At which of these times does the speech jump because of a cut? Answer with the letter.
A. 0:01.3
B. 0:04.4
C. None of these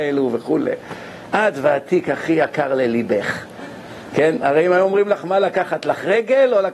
A